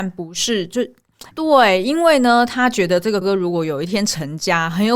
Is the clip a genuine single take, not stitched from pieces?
no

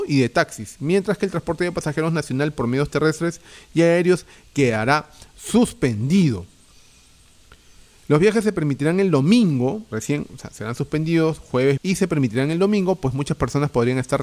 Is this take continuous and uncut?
no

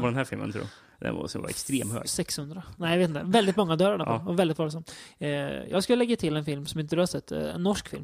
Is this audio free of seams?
yes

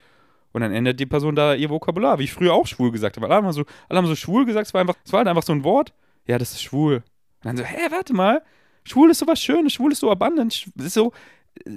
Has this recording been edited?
yes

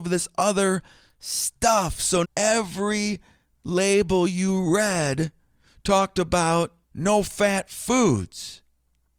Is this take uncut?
no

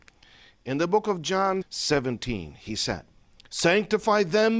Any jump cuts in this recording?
yes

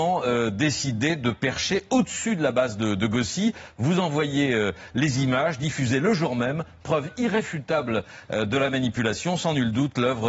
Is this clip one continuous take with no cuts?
yes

